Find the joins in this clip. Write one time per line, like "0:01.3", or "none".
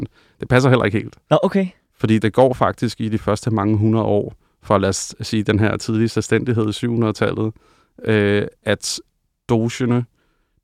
0:02.2